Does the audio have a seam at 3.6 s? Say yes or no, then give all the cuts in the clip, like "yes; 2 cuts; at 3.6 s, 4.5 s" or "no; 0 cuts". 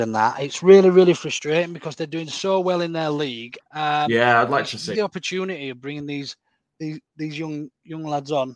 yes; 2 cuts; at 3.6 s, 4.9 s